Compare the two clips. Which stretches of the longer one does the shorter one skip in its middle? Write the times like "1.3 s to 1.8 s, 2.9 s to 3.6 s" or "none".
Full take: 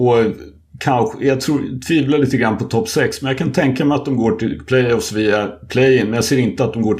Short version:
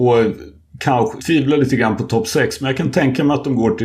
1.2 s to 1.8 s